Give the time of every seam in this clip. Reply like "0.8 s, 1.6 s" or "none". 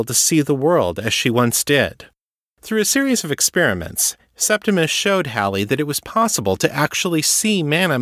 none